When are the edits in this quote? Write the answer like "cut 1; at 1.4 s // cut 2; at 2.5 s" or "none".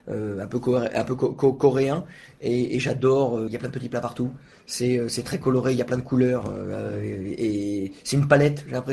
cut 1; at 3.5 s